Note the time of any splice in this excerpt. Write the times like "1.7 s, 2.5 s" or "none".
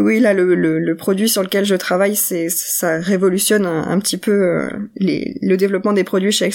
none